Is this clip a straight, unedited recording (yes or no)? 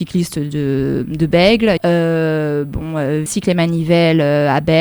no